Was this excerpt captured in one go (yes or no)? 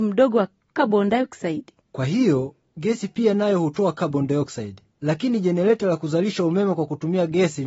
no